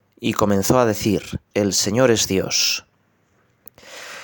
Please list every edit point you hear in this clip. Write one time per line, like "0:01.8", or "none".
0:01.5